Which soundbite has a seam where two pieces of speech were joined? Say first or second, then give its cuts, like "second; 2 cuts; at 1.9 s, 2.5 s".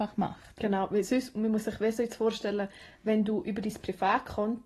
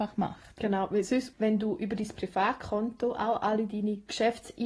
second; 1 cut; at 1.3 s